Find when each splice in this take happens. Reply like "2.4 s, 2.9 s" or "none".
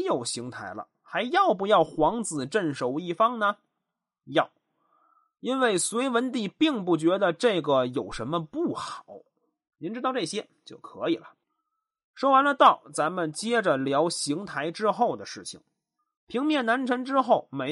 9.7 s